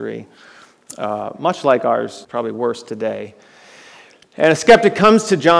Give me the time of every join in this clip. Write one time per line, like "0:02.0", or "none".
0:02.2

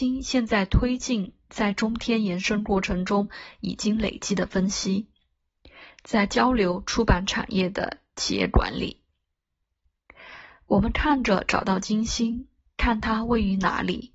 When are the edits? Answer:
none

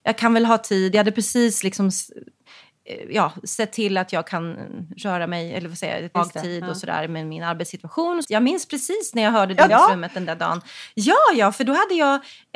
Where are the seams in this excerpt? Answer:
0:06.1
0:08.2
0:09.7

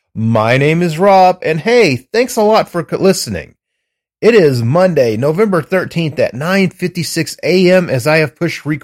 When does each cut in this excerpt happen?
none

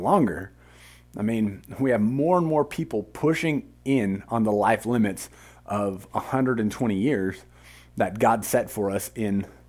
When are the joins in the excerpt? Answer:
none

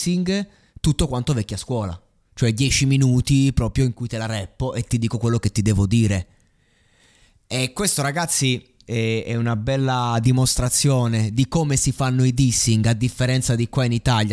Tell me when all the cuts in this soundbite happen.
none

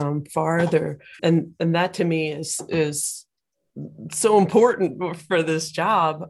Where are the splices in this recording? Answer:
0:01.2

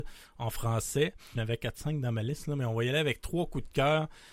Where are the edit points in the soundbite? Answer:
0:01.3

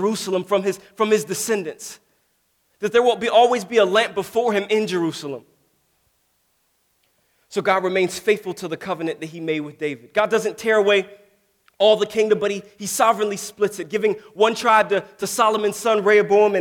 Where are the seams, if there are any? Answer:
none

